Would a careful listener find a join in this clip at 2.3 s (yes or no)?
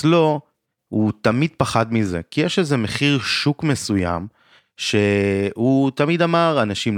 no